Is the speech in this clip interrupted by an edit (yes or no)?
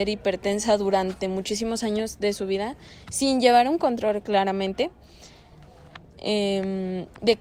no